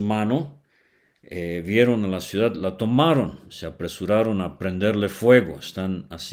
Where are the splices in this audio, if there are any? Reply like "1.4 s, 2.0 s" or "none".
none